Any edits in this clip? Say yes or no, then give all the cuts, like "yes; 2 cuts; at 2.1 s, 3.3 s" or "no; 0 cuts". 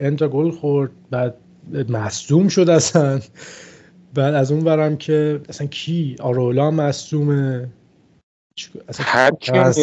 yes; 1 cut; at 5.4 s